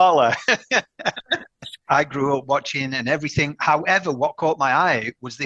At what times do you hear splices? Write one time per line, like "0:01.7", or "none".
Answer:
0:01.9